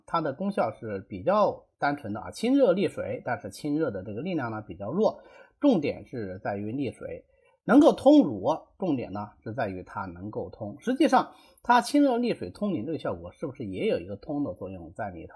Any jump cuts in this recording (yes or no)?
no